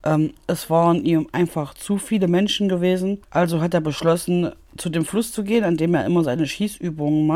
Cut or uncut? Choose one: cut